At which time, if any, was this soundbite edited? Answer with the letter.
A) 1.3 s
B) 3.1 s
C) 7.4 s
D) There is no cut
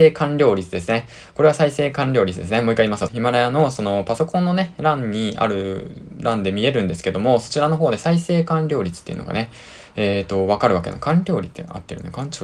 B